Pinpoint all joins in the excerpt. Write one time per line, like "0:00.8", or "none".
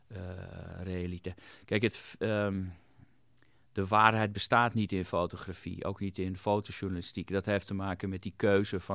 none

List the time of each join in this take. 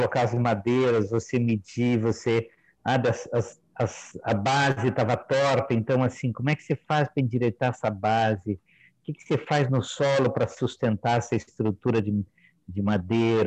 none

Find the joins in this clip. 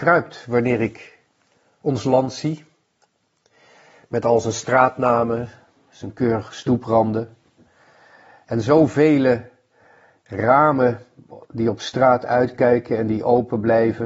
none

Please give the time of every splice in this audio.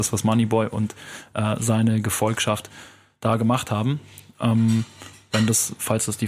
none

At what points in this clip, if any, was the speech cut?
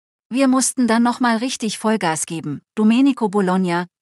0:02.7

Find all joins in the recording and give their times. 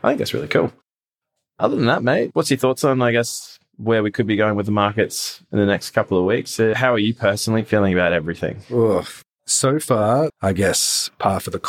0:10.3

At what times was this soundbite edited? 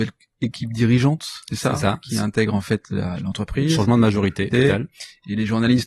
0:04.5

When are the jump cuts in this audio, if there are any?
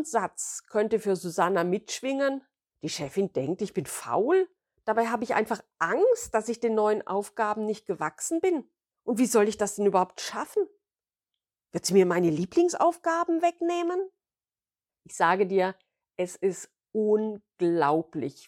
0:02.7

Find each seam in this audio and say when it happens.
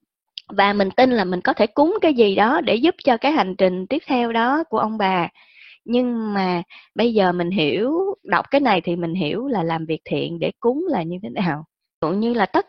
0:07.0

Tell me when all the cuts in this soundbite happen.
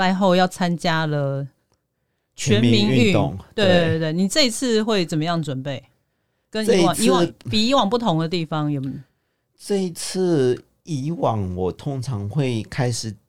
none

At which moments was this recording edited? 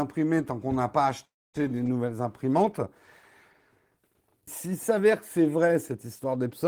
0:04.5

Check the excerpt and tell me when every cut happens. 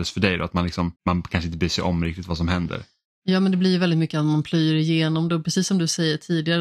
0:01.0

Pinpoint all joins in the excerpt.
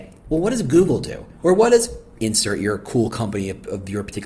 0:01.4

